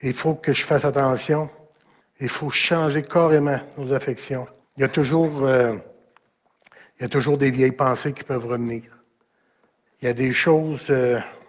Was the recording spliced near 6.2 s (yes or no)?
no